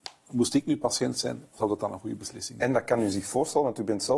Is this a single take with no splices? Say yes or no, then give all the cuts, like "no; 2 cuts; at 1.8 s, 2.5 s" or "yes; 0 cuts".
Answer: no; 1 cut; at 1.5 s